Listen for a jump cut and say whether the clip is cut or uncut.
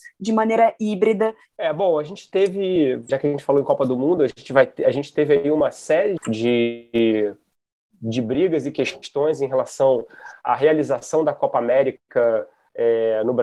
cut